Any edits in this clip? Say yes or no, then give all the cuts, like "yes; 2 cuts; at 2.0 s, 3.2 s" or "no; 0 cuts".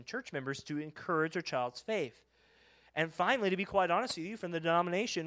no; 0 cuts